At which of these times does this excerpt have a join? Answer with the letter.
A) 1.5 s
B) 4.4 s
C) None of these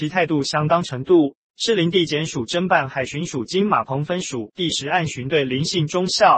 A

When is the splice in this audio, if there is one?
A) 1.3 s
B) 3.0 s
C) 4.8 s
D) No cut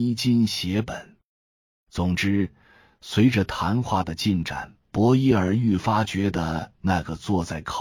C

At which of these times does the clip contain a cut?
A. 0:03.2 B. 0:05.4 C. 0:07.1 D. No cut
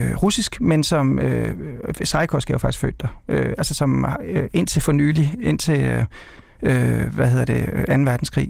D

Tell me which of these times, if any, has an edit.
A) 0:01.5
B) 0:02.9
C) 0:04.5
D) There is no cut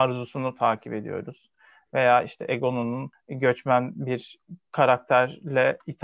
D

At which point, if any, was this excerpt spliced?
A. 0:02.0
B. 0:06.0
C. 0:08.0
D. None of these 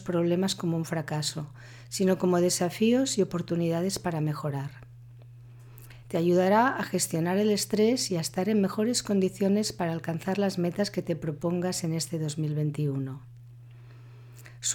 B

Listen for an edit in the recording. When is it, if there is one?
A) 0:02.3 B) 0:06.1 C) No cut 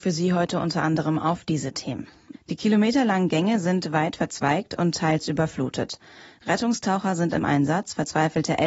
A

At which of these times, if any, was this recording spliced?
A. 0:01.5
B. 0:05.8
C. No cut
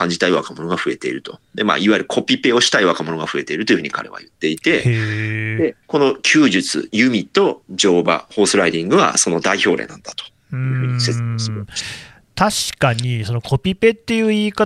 B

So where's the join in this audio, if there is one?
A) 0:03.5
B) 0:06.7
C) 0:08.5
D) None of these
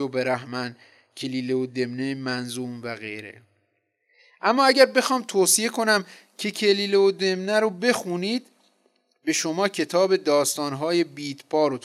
D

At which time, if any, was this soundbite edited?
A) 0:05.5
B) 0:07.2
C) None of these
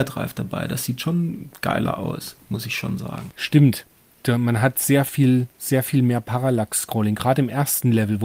A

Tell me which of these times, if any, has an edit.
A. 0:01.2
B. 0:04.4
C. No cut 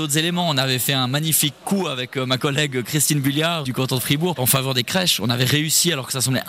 B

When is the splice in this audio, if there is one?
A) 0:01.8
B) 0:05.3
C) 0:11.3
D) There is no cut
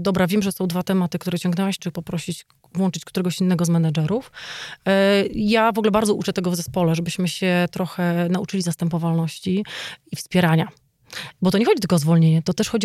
A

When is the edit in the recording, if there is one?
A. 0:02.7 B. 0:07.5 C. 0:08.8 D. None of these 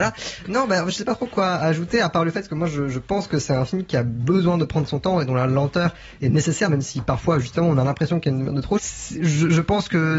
C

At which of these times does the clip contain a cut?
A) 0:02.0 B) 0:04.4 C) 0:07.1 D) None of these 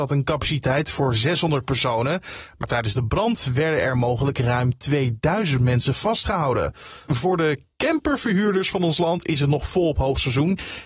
C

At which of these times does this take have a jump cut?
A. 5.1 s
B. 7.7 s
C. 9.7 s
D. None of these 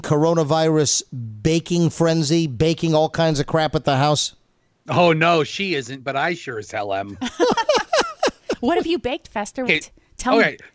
C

